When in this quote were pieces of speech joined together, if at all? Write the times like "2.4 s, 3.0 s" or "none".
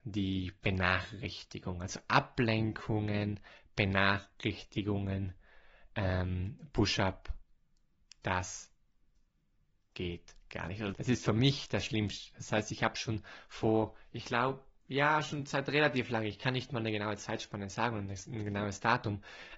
10.9 s